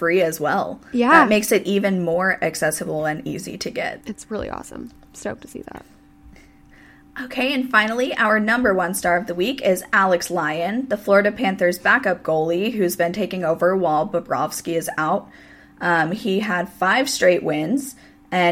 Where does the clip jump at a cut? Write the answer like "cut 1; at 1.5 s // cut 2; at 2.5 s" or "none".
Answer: cut 1; at 4.0 s